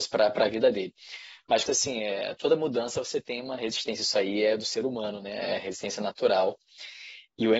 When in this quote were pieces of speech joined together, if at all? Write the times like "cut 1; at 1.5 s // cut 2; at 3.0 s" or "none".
cut 1; at 1.7 s